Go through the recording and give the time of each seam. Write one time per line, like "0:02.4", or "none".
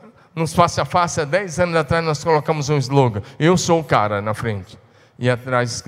none